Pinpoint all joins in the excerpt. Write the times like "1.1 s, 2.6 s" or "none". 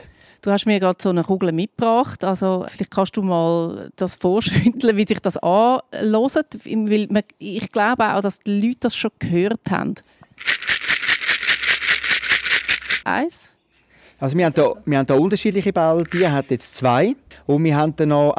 2.7 s, 13.0 s